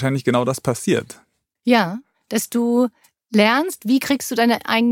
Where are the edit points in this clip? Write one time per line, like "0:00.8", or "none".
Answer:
none